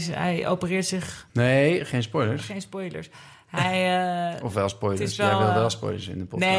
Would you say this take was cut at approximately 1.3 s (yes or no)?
yes